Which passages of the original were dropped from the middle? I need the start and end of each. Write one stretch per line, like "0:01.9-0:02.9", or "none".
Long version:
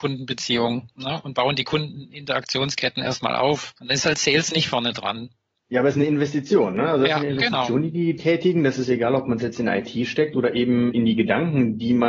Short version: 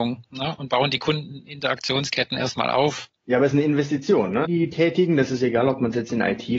0:03.7-0:05.5
0:06.9-0:07.9